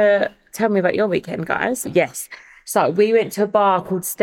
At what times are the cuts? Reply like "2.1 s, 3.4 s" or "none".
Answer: 1.8 s